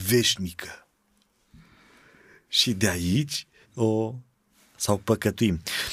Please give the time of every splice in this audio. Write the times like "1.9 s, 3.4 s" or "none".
3.6 s